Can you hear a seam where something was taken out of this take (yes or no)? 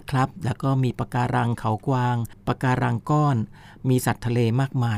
no